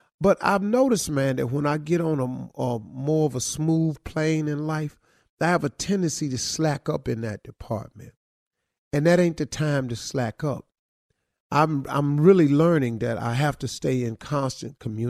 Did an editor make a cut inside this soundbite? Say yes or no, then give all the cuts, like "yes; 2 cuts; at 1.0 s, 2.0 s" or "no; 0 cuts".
no; 0 cuts